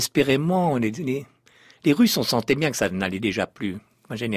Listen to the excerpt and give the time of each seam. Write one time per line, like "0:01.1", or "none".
none